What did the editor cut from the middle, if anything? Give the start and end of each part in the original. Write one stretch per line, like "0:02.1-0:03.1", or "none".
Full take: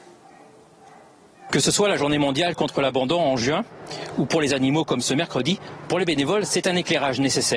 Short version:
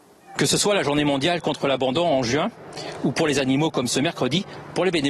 none